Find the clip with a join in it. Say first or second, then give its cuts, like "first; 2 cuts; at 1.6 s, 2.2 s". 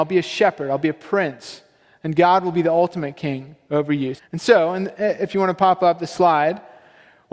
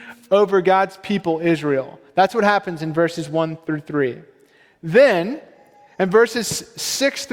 first; 1 cut; at 4.2 s